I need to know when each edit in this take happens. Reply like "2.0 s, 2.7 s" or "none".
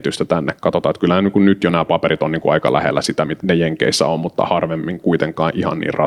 3.4 s